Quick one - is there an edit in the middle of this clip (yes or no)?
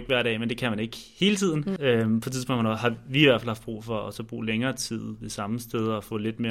yes